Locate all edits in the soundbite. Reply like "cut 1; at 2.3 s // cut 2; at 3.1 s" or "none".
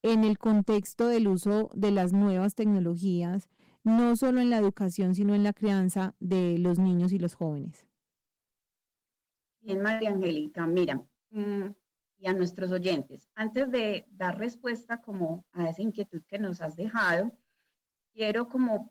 none

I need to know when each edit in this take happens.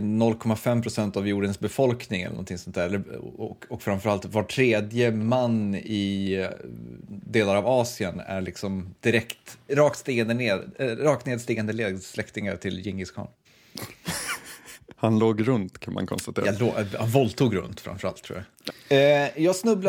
cut 1; at 9.7 s // cut 2; at 18.7 s

